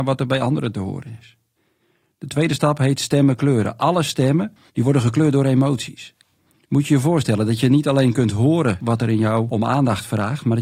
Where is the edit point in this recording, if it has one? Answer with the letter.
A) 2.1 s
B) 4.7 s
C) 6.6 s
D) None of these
B